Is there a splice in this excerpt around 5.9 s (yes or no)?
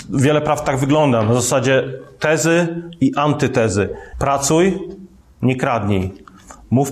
no